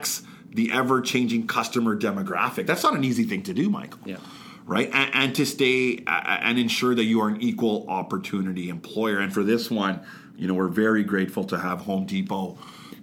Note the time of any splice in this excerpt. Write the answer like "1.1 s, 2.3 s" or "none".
none